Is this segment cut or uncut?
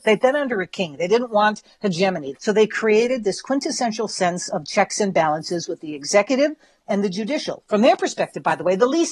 cut